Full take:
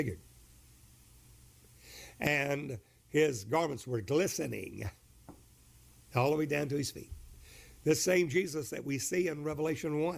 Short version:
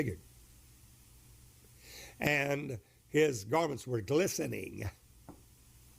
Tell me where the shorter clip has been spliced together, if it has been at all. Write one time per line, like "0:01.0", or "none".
none